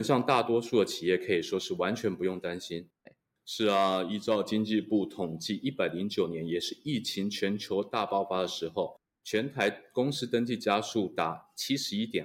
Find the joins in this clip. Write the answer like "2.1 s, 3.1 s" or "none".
3.1 s